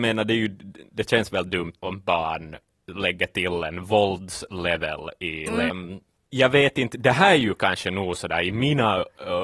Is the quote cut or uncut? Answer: cut